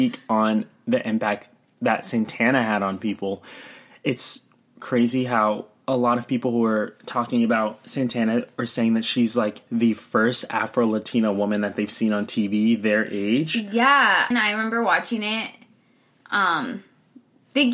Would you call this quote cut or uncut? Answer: cut